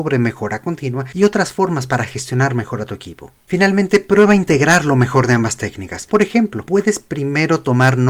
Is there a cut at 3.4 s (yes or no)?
no